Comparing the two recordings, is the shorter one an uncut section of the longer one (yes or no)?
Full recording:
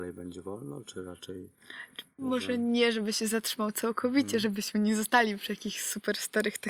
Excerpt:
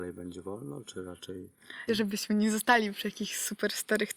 no